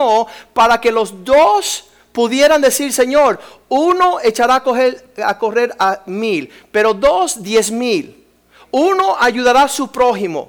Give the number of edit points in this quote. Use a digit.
0